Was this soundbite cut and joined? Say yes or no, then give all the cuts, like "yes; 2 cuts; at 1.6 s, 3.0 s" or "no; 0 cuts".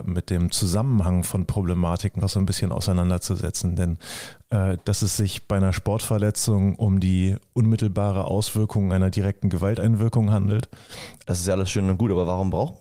yes; 3 cuts; at 2.2 s, 4.8 s, 11.2 s